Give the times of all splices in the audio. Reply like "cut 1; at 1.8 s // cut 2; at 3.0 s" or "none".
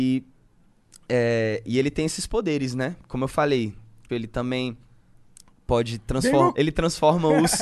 cut 1; at 4.1 s // cut 2; at 6.5 s